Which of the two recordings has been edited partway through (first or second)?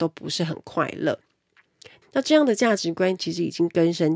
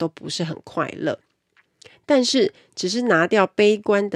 first